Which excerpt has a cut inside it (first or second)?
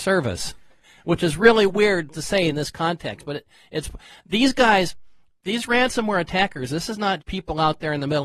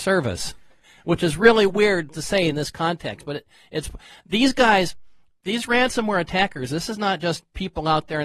first